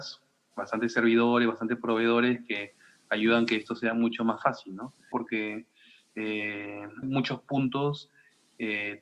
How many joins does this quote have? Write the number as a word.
two